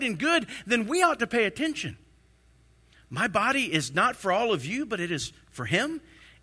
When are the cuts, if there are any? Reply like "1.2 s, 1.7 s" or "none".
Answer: 2.9 s